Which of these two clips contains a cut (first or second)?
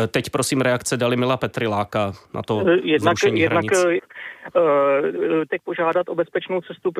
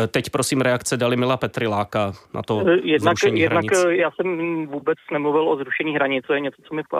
first